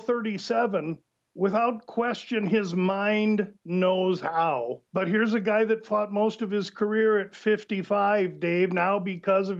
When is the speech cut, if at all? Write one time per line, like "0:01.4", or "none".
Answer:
0:04.9